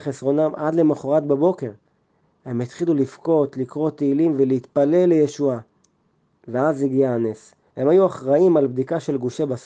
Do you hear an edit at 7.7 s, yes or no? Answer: yes